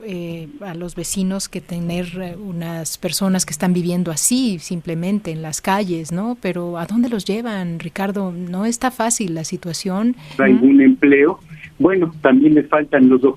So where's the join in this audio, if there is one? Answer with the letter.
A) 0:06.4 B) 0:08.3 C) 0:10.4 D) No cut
C